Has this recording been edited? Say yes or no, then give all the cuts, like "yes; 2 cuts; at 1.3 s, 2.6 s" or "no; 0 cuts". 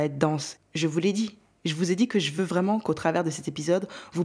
no; 0 cuts